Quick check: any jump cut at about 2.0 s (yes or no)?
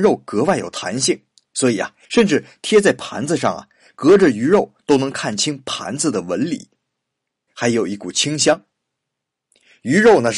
yes